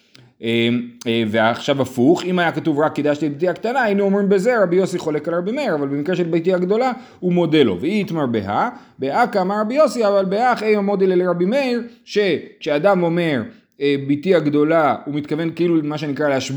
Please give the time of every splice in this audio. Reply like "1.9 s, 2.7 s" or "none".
none